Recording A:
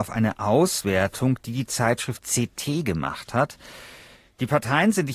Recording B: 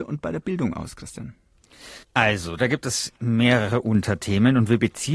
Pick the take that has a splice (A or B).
B